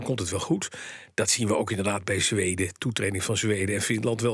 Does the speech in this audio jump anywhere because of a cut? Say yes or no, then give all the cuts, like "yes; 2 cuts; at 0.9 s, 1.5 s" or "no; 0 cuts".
no; 0 cuts